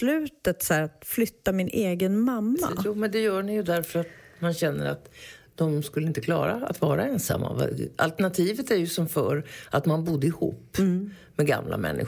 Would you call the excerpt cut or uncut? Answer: uncut